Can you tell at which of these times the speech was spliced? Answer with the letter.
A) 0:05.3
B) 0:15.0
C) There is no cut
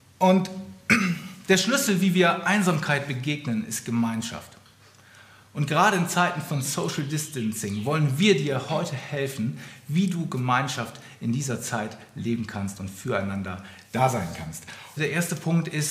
B